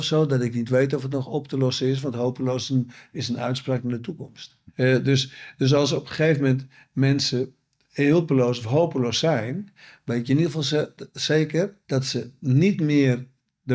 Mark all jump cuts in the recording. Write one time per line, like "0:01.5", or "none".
0:04.7
0:11.8